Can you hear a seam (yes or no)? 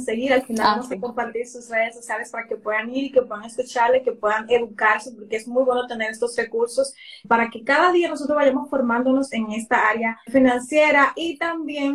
yes